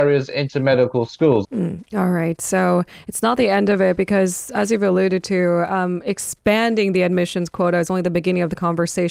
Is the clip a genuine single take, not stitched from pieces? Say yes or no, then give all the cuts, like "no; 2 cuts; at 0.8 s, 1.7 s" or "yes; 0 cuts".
no; 1 cut; at 1.4 s